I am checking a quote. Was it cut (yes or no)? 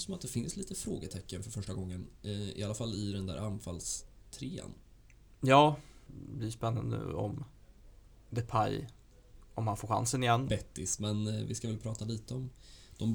yes